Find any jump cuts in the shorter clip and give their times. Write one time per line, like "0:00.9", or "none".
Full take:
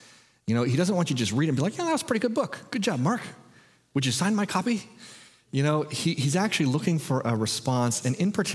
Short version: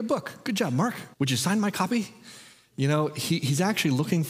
0:01.1